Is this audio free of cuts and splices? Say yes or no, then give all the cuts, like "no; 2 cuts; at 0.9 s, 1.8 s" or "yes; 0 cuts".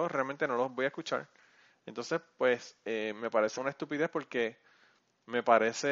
no; 1 cut; at 3.6 s